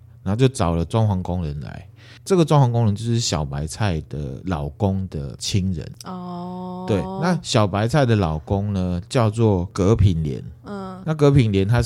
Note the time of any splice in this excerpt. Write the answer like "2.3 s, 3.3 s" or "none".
none